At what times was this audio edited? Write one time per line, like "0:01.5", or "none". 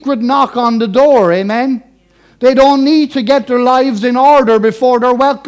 none